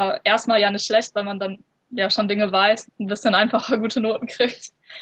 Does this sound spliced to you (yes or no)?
yes